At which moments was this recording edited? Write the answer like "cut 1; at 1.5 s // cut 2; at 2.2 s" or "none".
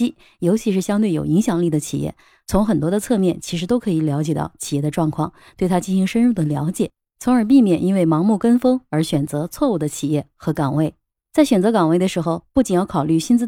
cut 1; at 11.2 s